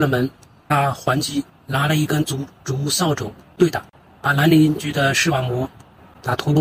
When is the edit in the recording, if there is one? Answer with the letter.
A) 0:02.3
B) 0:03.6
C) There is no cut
C